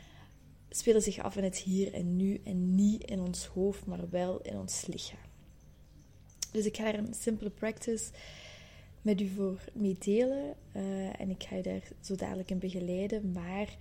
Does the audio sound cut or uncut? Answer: uncut